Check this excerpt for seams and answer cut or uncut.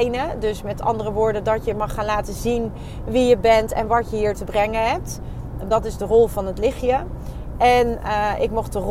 uncut